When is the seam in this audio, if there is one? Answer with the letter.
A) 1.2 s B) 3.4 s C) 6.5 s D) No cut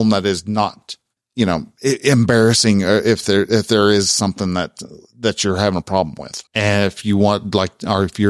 C